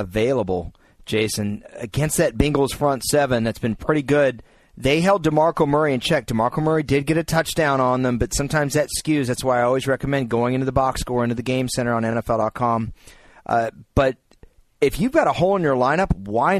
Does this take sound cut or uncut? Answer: uncut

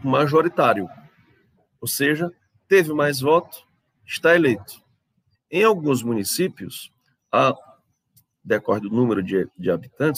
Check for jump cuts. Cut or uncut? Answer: cut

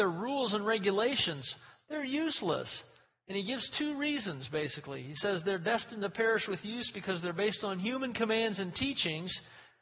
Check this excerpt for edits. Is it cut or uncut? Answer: uncut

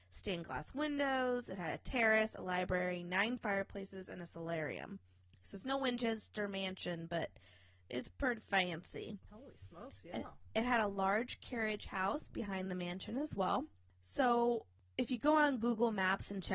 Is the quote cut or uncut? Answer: uncut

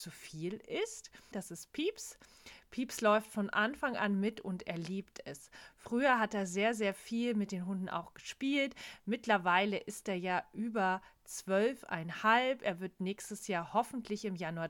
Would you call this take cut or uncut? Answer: cut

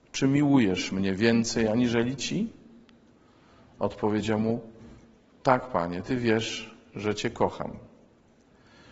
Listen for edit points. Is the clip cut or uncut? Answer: uncut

